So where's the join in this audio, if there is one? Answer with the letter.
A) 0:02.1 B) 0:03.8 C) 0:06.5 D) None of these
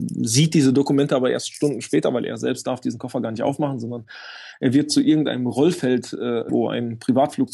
C